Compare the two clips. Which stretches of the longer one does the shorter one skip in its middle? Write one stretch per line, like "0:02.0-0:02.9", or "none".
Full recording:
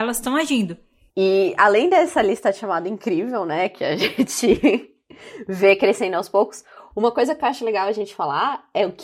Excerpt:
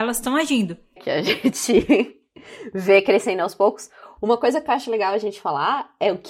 0:01.0-0:03.7